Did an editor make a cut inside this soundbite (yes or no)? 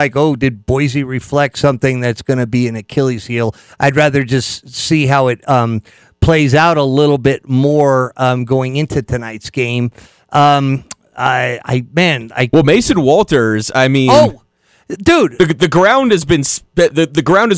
no